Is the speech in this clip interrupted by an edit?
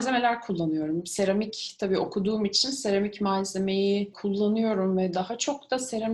no; 0 cuts

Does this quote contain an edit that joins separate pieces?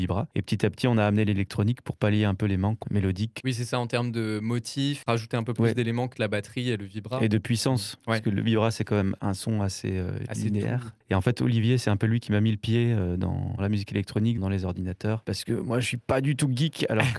yes; 1 cut; at 6.1 s

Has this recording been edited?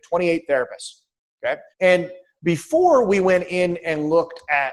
yes; 1 cut; at 1.7 s

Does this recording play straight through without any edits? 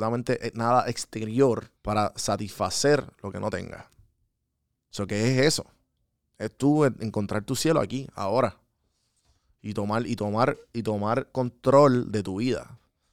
no; 1 cut; at 1.7 s

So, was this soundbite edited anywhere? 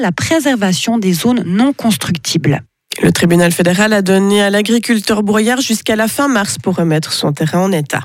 no; 0 cuts

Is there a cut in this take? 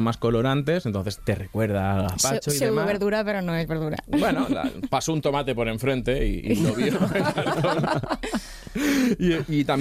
yes; 1 cut; at 1.2 s

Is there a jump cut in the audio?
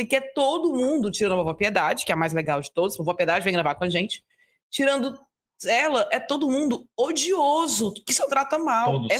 no; 0 cuts

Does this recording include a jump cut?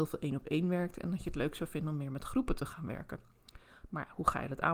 no; 0 cuts

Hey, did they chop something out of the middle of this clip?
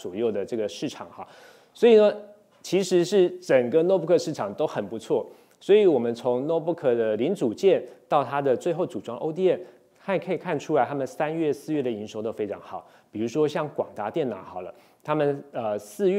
no; 0 cuts

